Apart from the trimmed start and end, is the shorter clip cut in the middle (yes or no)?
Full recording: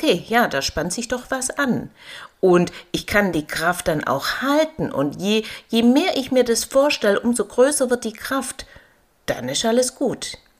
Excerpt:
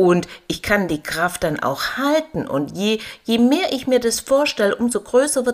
no